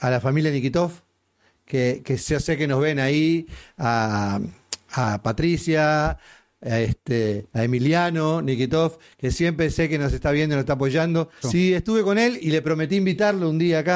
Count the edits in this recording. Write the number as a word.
two